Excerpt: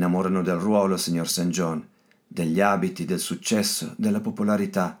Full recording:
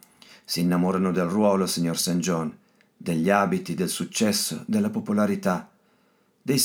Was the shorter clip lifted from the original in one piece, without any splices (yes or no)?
yes